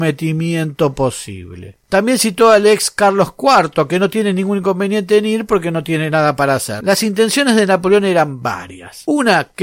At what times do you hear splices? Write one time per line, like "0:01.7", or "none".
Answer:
0:01.9

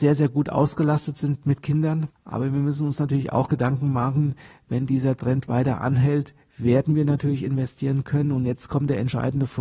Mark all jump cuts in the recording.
0:02.2

